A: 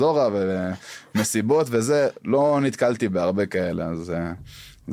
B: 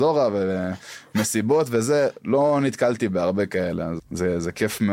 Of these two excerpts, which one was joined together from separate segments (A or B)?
B